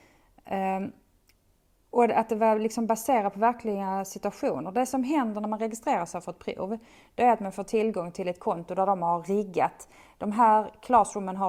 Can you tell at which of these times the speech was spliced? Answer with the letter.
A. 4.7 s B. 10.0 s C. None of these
C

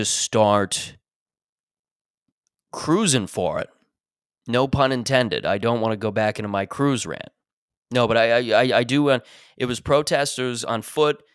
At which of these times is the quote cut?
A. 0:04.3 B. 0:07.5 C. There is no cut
C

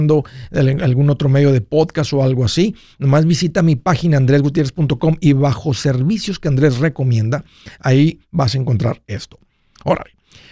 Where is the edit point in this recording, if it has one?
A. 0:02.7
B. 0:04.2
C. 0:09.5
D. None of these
D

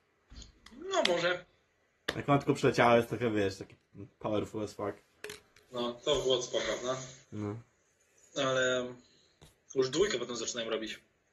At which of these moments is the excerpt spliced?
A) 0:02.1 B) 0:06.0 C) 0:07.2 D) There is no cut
C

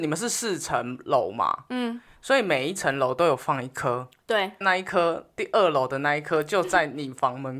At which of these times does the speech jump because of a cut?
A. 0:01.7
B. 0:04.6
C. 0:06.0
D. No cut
B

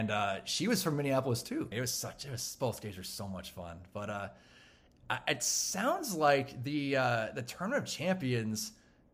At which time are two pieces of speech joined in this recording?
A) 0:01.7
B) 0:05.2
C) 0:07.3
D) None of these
A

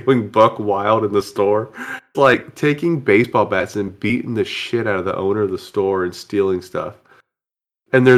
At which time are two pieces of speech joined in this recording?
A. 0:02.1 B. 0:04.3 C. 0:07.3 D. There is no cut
A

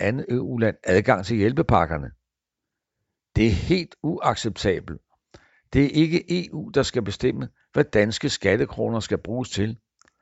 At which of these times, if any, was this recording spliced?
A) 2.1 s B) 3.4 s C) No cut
C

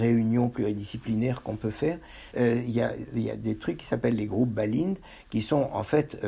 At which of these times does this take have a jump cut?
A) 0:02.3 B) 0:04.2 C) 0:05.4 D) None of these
A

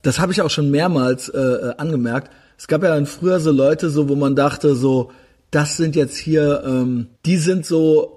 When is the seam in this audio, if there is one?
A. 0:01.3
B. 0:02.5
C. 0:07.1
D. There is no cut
C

